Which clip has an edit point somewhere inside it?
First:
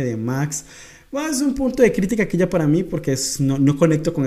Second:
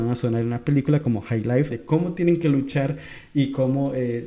second; 1 cut; at 1.7 s

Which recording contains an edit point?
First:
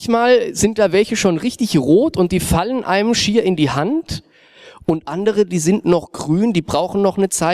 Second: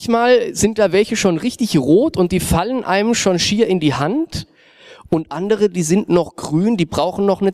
first; 1 cut; at 3.1 s

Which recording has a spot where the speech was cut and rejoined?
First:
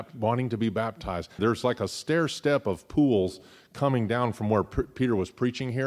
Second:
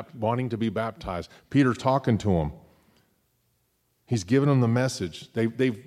first; 1 cut; at 1.4 s

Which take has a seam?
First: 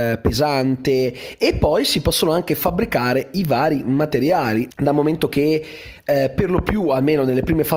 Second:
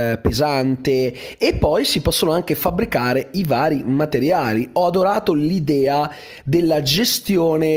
first; 1 cut; at 4.7 s

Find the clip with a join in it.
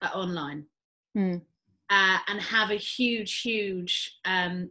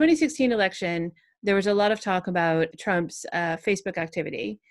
second; 1 cut; at 2.7 s

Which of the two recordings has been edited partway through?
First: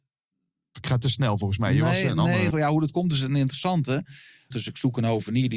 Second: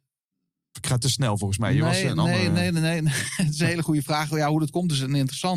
first; 2 cuts; at 2.5 s, 4.5 s

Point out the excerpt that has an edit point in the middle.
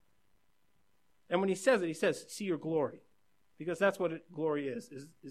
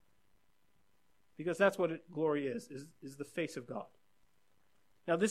second; 1 cut; at 1.2 s

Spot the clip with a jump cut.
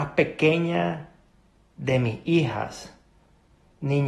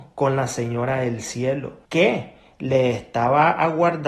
second; 1 cut; at 1.8 s

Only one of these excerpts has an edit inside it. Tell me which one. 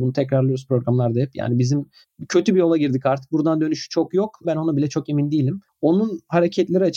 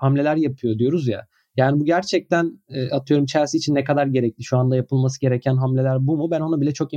first; 2 cuts; at 4.4 s, 5.7 s

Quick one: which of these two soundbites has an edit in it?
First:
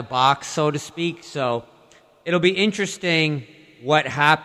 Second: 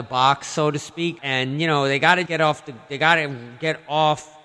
second; 2 cuts; at 1.2 s, 2.3 s

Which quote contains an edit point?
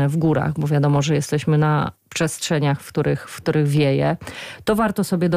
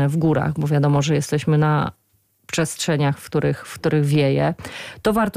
first; 1 cut; at 2.0 s

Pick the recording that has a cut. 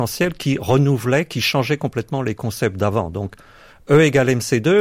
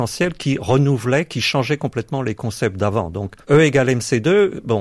second; 1 cut; at 3.4 s

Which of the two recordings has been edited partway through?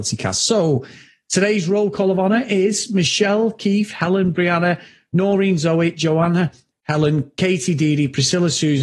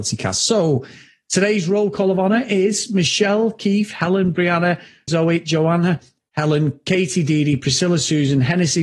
second; 1 cut; at 5.1 s

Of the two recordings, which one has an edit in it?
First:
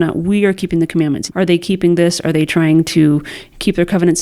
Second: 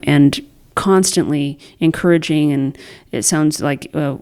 first; 1 cut; at 1.3 s

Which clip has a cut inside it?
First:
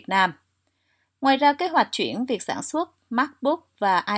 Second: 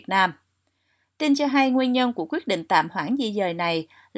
first; 1 cut; at 1.2 s

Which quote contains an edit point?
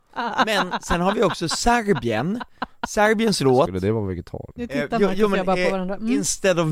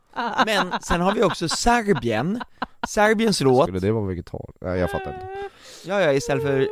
first; 1 cut; at 4.6 s

